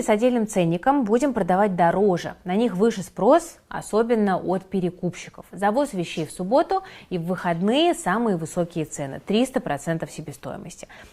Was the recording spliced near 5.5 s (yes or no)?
yes